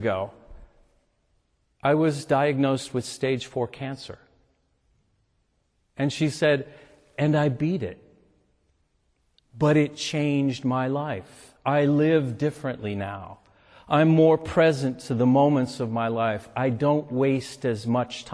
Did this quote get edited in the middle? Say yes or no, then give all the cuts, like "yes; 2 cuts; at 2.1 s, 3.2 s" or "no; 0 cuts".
no; 0 cuts